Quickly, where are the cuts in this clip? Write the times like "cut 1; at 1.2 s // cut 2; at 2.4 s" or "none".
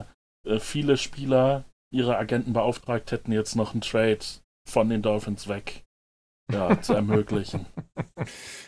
none